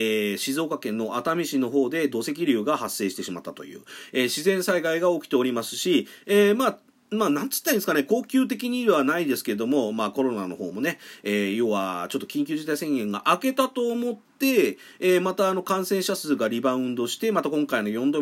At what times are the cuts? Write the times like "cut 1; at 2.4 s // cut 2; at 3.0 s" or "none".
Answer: none